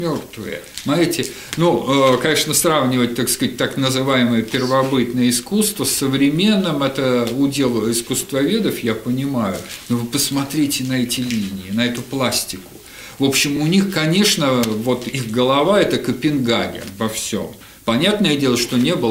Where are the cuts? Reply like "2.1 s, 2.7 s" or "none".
none